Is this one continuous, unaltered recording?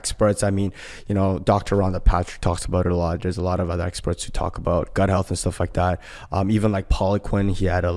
yes; 0 cuts

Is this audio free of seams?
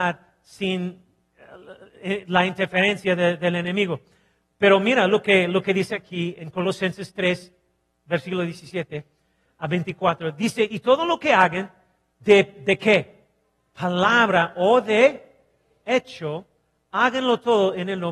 yes; 0 cuts

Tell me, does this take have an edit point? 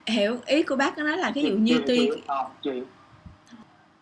no; 0 cuts

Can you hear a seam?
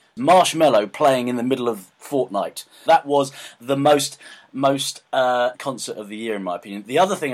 yes; 2 cuts; at 2.9 s, 5.5 s

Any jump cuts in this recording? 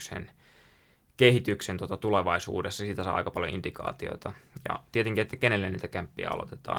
no; 0 cuts

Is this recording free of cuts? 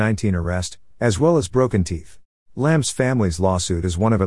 no; 2 cuts; at 0.9 s, 2.4 s

